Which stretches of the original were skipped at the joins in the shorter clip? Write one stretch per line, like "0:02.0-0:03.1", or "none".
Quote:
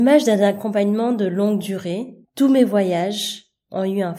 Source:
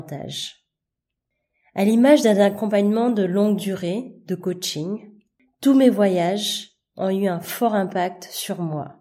0:04.2-0:05.5